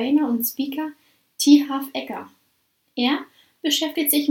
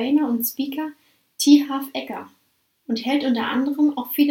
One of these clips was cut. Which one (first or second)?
second